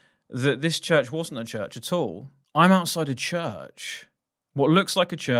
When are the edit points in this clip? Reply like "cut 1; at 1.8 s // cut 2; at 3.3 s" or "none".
cut 1; at 2.4 s